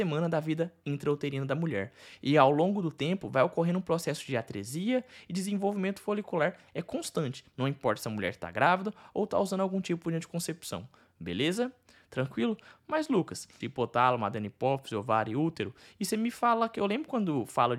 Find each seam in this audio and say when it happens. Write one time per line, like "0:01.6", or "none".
0:13.6